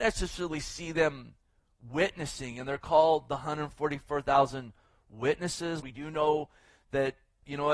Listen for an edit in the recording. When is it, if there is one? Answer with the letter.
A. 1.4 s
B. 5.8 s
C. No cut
B